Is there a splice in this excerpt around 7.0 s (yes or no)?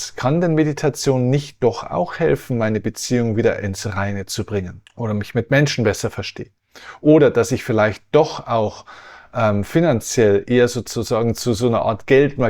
no